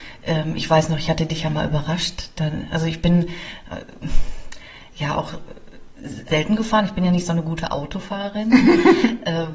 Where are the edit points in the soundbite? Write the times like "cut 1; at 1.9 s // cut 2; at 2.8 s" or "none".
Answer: cut 1; at 6.3 s